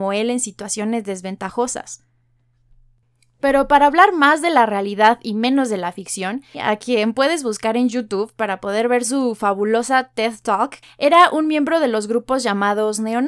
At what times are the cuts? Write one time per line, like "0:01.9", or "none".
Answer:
0:06.5
0:10.8